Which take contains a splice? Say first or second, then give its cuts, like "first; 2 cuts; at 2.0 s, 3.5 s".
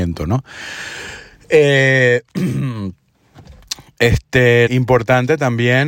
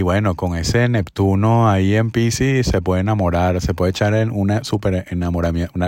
first; 1 cut; at 4.7 s